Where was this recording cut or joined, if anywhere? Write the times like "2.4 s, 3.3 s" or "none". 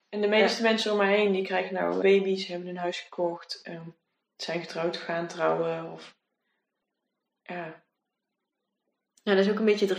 2.0 s